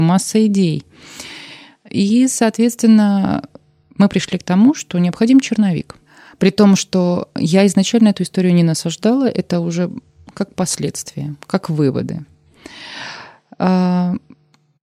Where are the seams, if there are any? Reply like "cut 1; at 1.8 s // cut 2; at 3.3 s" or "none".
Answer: none